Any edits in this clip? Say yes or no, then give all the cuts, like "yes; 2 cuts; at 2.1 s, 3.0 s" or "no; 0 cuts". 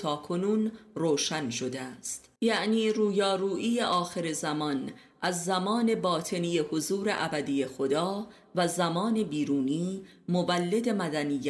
yes; 1 cut; at 2.4 s